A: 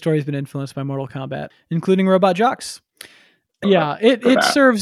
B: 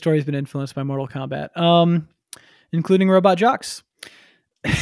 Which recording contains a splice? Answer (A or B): A